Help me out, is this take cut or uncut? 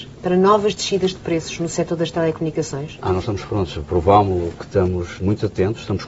cut